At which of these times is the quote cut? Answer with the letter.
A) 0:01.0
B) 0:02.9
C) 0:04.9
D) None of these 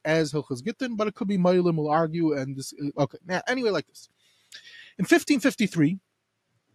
B